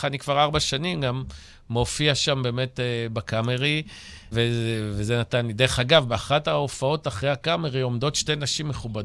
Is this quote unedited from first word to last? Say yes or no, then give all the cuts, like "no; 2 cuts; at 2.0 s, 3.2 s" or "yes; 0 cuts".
no; 1 cut; at 4.3 s